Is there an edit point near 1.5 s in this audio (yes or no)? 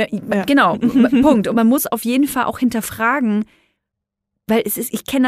yes